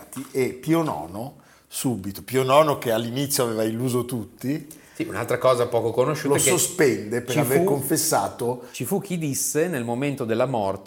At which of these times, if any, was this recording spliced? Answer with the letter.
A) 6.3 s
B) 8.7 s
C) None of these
C